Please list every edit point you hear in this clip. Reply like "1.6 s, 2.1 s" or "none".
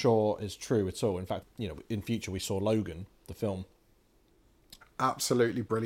1.4 s, 4.8 s